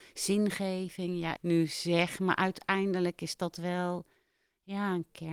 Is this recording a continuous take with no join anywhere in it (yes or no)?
no